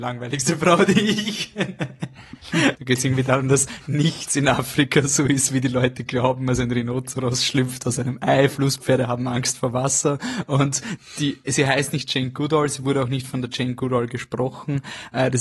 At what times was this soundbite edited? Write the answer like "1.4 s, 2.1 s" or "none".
2.8 s

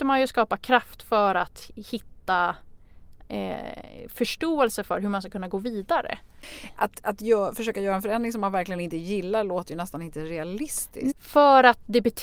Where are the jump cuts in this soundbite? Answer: 11.1 s

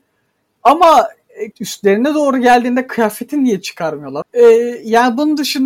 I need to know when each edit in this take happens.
1.5 s, 4.2 s

